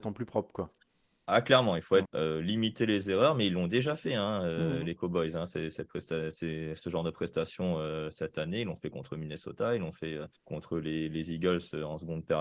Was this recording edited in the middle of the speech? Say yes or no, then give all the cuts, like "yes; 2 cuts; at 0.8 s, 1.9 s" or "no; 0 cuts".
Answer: yes; 2 cuts; at 2.0 s, 10.3 s